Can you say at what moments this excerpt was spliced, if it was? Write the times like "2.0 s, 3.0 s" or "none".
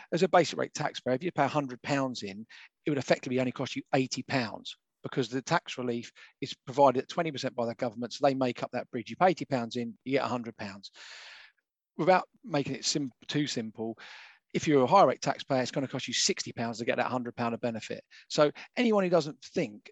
none